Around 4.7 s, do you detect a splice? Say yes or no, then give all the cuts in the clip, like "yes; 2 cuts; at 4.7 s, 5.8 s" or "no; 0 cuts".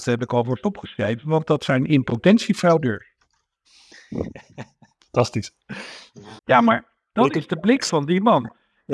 no; 1 cut; at 6.4 s